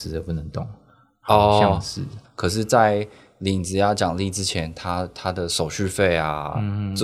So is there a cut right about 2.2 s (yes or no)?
yes